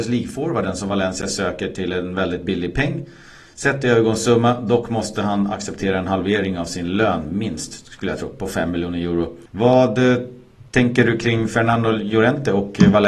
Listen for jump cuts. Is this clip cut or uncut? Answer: uncut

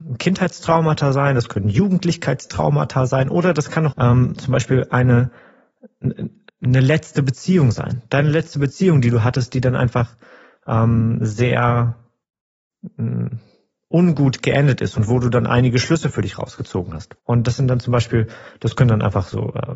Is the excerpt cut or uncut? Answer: cut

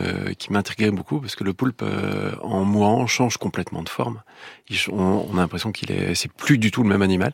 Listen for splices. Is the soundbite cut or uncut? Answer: uncut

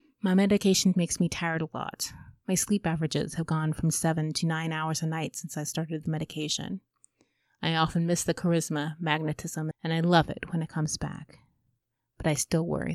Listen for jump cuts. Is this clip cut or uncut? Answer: cut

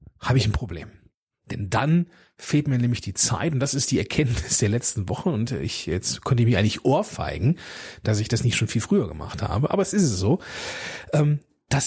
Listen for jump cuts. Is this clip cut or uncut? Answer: uncut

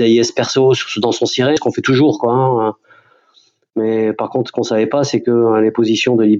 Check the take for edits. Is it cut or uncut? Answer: cut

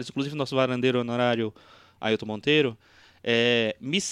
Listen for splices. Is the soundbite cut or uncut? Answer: uncut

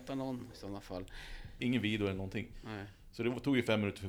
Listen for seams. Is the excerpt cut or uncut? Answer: cut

